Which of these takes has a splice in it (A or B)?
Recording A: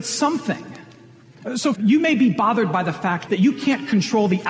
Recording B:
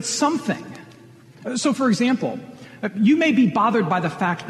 A